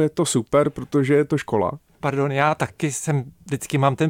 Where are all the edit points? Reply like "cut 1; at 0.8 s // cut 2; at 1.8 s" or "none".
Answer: none